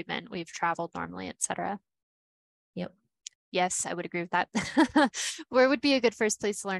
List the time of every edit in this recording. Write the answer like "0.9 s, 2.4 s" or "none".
3.3 s